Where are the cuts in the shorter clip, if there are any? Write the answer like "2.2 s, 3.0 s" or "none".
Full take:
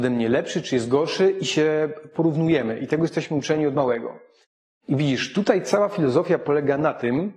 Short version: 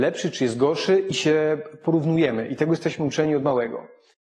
none